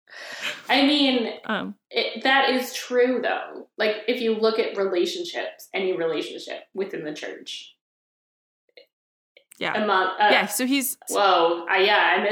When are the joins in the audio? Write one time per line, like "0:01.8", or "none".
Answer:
0:11.1